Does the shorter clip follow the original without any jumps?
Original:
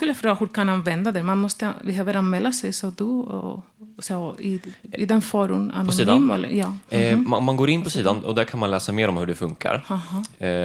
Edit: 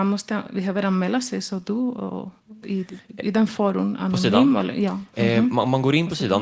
no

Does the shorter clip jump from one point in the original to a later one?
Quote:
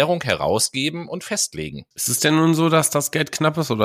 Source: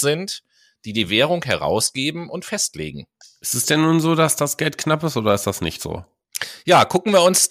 yes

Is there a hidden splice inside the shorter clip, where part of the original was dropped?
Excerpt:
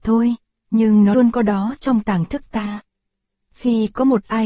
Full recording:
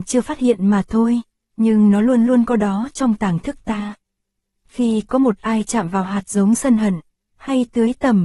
yes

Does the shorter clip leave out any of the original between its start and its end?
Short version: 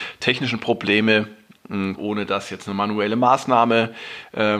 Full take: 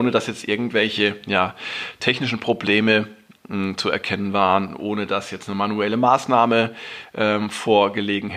yes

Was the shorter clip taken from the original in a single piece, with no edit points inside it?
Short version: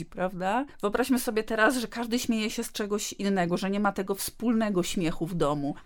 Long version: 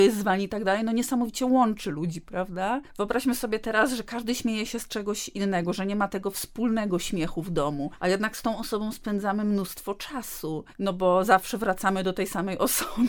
yes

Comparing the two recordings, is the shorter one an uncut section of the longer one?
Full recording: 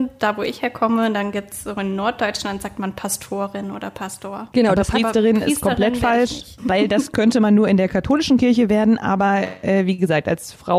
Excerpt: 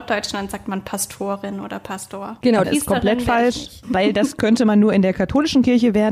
no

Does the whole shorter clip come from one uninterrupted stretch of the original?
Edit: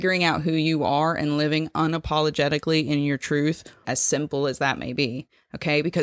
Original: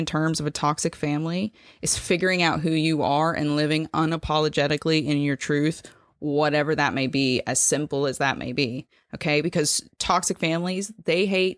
no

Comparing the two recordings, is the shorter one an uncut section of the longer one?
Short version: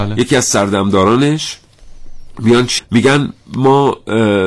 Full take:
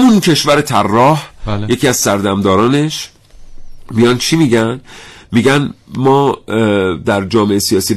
no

